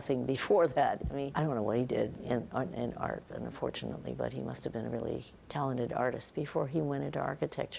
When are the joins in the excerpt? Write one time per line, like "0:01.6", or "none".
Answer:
0:01.3
0:05.4